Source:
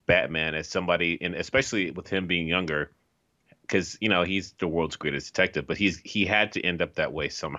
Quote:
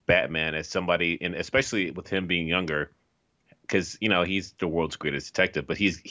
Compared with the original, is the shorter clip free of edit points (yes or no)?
yes